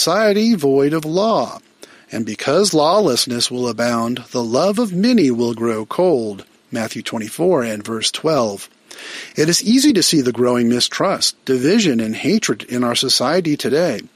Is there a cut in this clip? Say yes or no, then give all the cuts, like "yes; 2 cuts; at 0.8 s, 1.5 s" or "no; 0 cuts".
no; 0 cuts